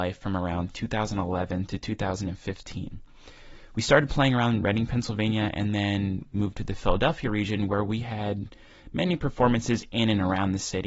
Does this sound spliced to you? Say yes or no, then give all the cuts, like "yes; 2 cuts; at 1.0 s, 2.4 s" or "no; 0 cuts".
no; 0 cuts